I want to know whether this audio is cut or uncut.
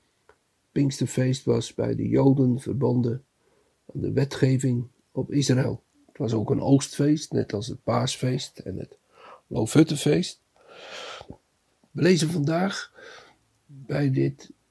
cut